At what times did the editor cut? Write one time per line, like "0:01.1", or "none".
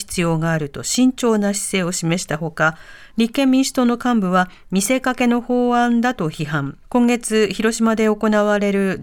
0:06.8